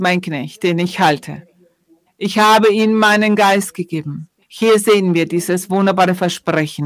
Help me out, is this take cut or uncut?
cut